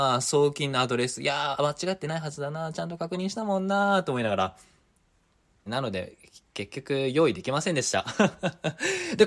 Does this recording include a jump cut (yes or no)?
yes